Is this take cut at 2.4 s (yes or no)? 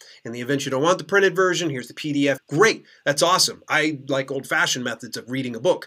yes